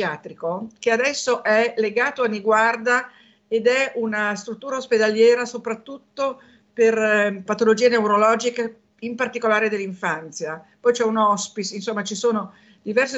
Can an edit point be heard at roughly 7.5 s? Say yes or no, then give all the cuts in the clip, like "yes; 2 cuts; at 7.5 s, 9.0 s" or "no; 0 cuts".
yes; 1 cut; at 7.5 s